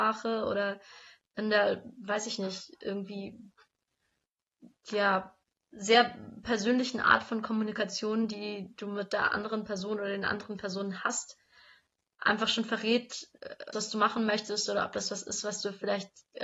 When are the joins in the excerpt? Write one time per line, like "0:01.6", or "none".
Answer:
0:13.7